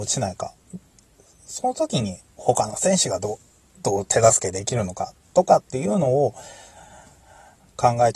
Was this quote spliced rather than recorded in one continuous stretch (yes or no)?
no